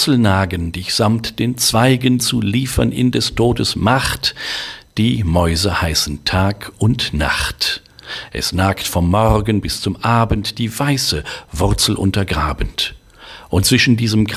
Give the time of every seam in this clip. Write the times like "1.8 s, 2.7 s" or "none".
2.2 s, 8.3 s